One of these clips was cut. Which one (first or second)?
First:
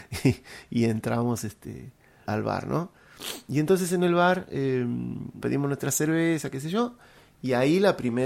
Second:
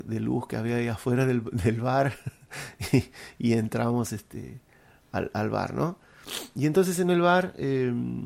first